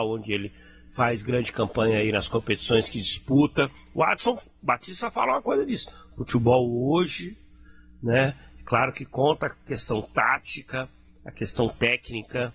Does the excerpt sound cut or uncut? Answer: uncut